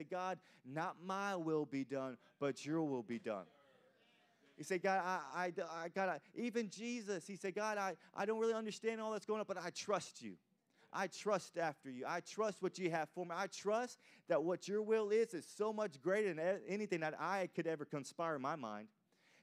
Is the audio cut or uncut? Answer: uncut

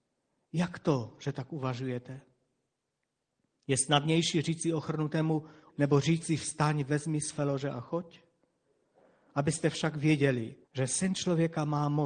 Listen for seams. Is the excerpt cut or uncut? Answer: cut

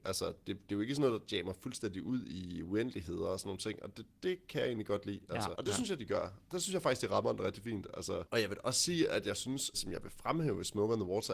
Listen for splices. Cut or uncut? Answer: cut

